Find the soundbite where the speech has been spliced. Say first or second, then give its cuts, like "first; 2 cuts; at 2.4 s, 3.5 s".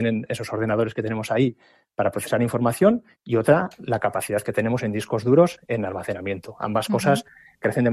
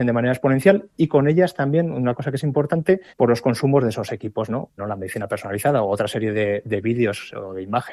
second; 2 cuts; at 3.1 s, 4.8 s